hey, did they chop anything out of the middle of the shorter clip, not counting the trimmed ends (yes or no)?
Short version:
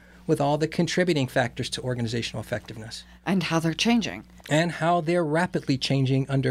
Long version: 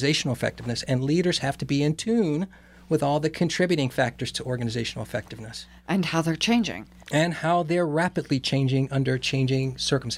no